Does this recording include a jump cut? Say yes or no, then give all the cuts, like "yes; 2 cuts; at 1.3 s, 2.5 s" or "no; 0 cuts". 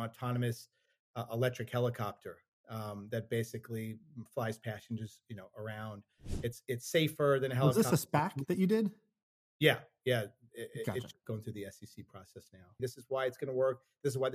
yes; 2 cuts; at 11.2 s, 12.8 s